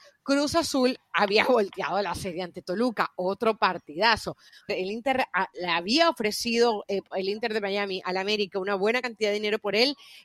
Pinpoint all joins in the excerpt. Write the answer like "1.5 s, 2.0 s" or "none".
4.7 s